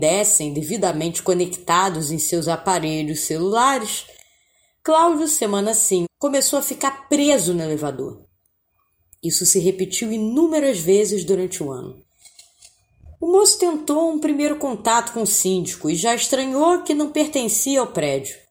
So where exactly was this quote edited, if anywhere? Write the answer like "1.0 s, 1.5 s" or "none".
6.0 s